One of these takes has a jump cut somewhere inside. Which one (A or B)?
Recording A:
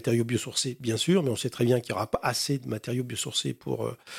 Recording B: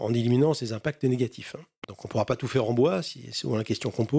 B